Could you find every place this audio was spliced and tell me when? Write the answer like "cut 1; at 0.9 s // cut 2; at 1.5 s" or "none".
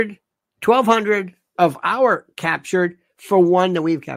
cut 1; at 1.5 s